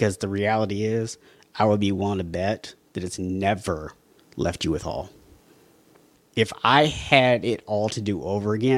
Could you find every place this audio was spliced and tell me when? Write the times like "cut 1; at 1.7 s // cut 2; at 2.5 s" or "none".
cut 1; at 6.2 s